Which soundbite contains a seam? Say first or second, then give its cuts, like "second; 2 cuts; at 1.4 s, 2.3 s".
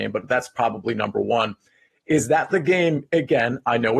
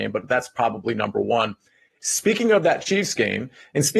second; 1 cut; at 2.0 s